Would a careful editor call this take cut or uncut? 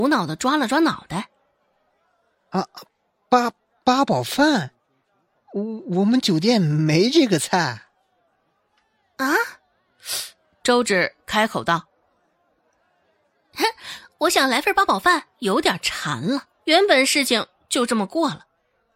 cut